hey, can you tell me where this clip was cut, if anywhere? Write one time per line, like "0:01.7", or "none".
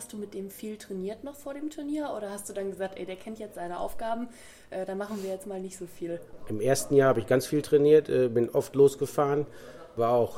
none